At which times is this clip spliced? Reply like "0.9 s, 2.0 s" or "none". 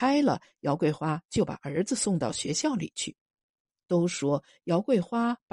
none